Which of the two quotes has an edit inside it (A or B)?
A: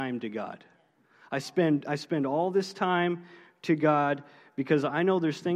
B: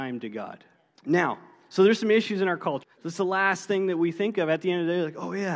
B